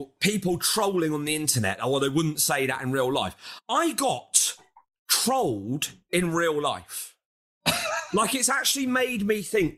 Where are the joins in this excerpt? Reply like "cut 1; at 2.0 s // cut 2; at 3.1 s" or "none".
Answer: none